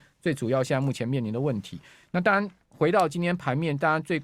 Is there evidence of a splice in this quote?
no; 0 cuts

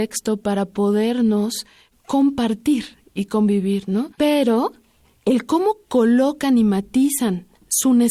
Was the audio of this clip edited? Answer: yes; 2 cuts; at 1.9 s, 4.2 s

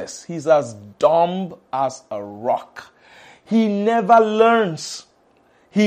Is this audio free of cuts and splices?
yes; 0 cuts

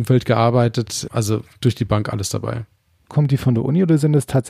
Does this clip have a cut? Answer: yes; 2 cuts; at 1.1 s, 3.1 s

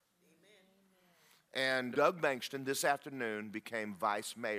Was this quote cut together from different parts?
yes; 1 cut; at 1.9 s

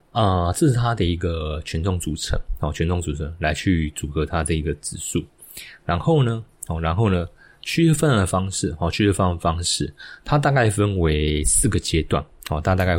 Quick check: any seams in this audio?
no; 0 cuts

